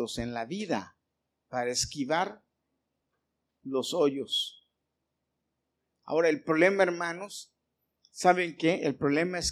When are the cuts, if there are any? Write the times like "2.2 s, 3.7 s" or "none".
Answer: 6.0 s